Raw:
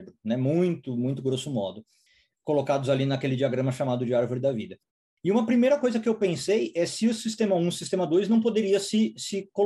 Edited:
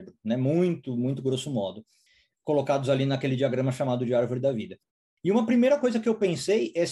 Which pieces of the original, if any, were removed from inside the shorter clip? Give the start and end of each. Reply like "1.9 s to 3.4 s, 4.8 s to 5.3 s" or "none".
none